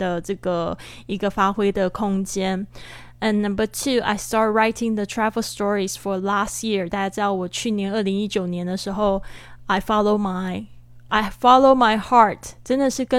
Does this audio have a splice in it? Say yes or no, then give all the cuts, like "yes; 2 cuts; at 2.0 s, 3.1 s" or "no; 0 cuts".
no; 0 cuts